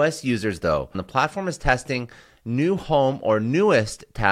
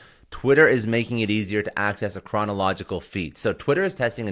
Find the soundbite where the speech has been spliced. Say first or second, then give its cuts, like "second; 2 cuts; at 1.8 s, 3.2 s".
first; 1 cut; at 0.9 s